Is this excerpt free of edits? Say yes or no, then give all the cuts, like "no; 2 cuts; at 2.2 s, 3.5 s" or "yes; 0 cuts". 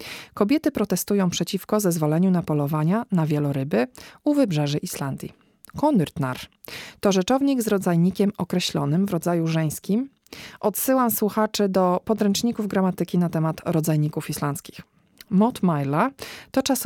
yes; 0 cuts